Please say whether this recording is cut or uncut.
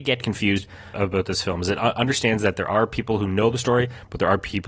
cut